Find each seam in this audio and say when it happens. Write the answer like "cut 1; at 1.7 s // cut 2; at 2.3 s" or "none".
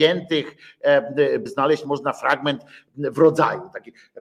cut 1; at 1.5 s

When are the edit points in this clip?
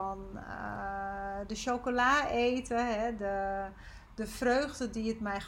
none

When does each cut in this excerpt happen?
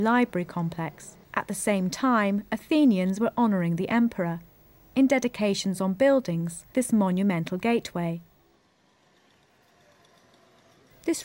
cut 1; at 1.2 s // cut 2; at 6.7 s

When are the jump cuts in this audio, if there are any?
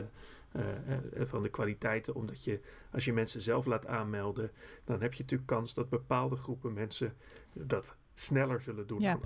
none

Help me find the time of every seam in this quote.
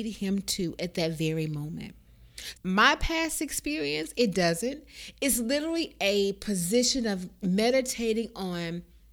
cut 1; at 2.5 s

